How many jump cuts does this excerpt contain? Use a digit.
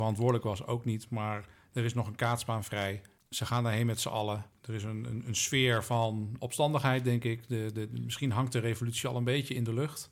0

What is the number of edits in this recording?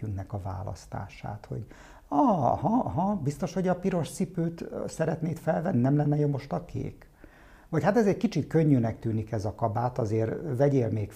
0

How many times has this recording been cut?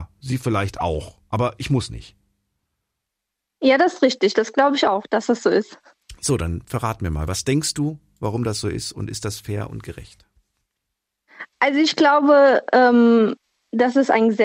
0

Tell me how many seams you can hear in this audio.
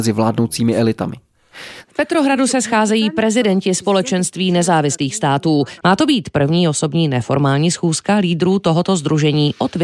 2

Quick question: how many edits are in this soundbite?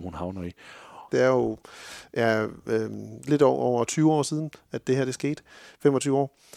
1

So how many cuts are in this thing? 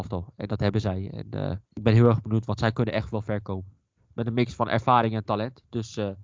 2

